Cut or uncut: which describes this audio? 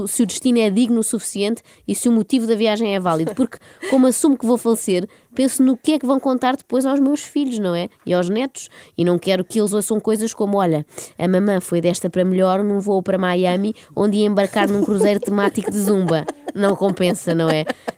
uncut